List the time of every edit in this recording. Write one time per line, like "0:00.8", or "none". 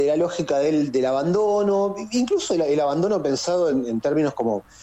none